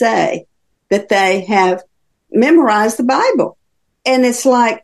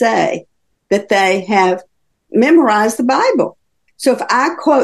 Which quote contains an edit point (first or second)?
second